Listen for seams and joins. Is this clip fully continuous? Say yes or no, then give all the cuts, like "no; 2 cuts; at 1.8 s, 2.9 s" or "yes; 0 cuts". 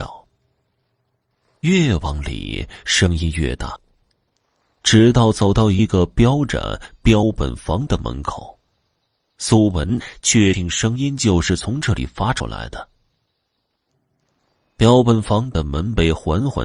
yes; 0 cuts